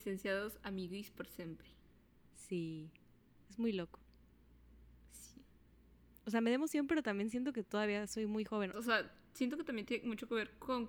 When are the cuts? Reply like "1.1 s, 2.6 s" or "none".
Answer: 8.7 s